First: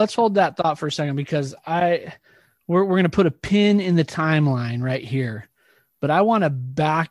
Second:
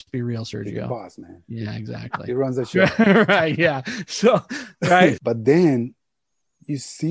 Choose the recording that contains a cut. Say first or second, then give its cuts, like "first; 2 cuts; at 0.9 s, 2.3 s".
second; 1 cut; at 5.2 s